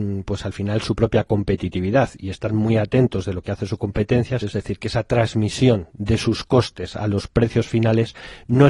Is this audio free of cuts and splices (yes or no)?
no